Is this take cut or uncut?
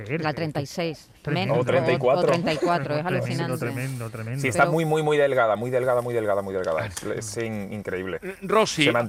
uncut